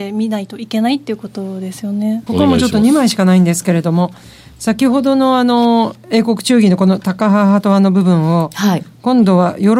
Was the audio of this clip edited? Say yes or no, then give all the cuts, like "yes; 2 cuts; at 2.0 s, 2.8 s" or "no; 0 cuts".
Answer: yes; 1 cut; at 2.3 s